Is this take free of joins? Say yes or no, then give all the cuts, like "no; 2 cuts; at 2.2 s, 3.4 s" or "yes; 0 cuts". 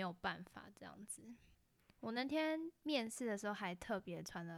yes; 0 cuts